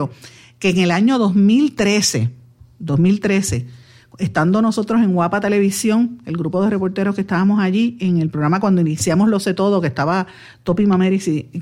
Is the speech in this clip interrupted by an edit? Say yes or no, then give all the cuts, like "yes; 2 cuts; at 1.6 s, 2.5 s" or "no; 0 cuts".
no; 0 cuts